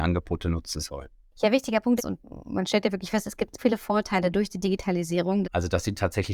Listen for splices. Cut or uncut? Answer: cut